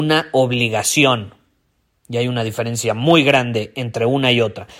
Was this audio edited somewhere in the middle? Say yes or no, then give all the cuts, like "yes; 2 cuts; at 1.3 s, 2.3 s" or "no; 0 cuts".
no; 0 cuts